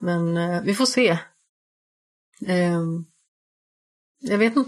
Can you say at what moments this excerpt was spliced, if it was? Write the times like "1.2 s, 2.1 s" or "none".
none

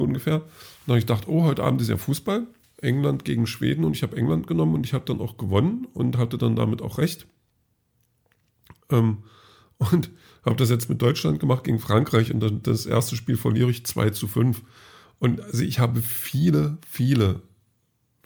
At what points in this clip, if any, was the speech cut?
2.6 s

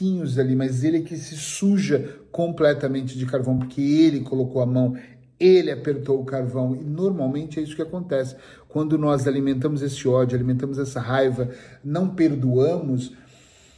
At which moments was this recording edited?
none

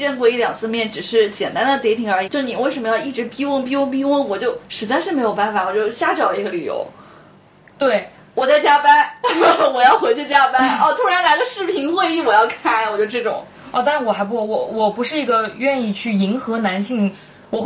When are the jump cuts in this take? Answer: 2.3 s

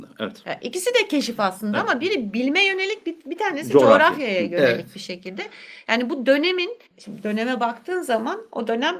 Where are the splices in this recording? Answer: 6.9 s

